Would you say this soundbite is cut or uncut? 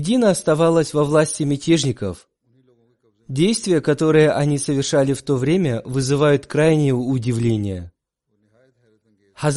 uncut